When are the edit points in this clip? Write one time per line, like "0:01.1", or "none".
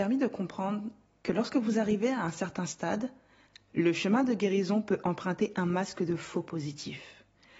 none